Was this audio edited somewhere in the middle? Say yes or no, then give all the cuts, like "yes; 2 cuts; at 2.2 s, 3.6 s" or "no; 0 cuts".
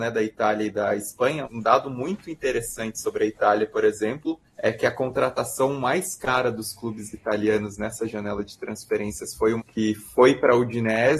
yes; 3 cuts; at 1.4 s, 4.5 s, 9.6 s